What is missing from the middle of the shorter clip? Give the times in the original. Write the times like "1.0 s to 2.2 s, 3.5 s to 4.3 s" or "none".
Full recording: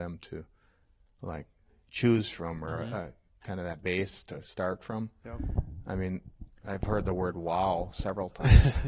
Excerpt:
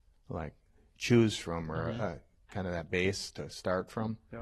none